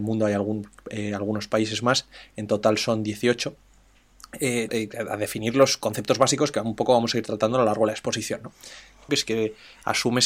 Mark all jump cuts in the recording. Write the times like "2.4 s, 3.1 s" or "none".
4.7 s, 9.1 s